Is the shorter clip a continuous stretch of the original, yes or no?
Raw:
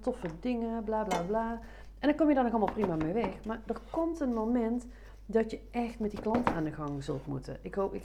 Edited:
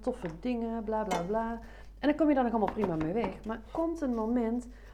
no